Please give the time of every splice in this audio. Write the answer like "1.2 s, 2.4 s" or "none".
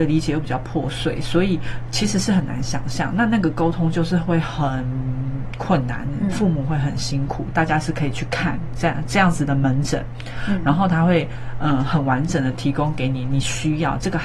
7.5 s